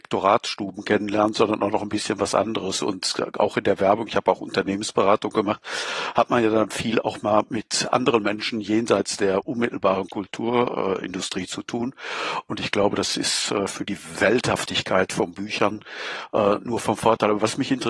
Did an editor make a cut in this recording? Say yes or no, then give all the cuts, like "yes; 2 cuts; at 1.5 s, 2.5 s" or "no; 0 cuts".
no; 0 cuts